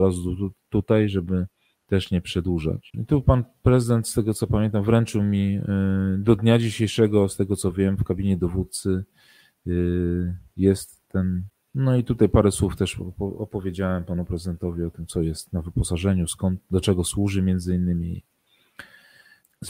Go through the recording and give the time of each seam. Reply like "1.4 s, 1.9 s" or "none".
2.9 s